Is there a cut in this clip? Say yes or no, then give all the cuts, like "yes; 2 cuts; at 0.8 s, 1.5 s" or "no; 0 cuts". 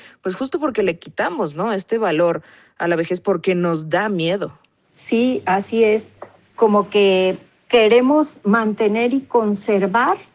no; 0 cuts